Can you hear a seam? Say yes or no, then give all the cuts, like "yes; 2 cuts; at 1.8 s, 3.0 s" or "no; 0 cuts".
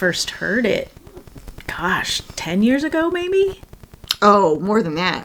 no; 0 cuts